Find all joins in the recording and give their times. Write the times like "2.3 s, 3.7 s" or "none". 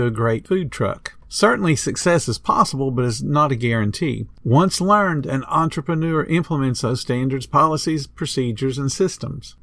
4.3 s

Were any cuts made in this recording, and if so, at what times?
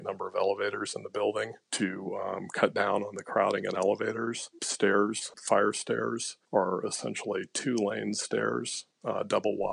4.6 s, 6.4 s

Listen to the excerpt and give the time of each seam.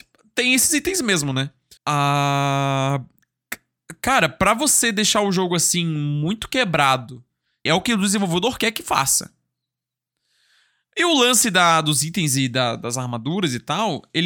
1.8 s, 7.7 s

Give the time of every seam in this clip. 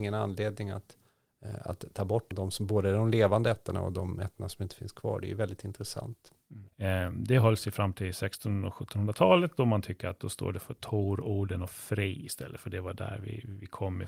2.3 s, 6.7 s

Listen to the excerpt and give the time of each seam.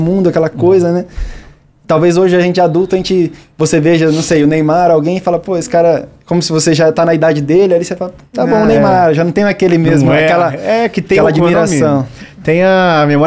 none

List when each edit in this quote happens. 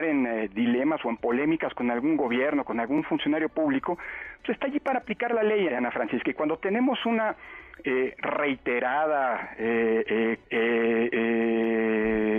5.7 s, 10.4 s

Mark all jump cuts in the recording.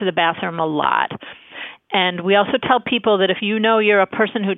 none

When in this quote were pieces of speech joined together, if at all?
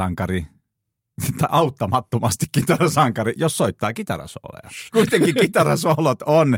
4.9 s

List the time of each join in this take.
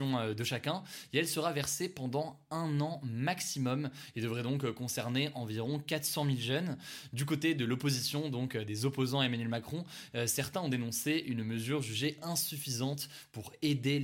none

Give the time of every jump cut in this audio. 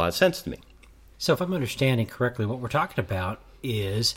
none

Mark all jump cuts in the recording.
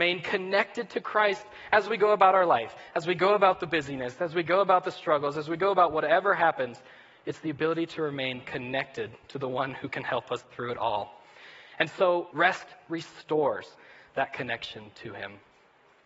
12.3 s

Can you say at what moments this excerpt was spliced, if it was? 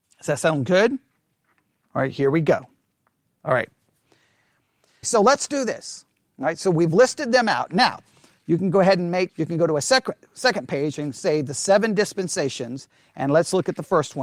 5.0 s, 9.3 s

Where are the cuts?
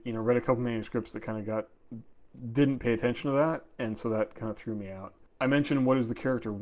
none

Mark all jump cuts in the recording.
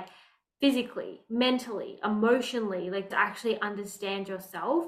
3.1 s

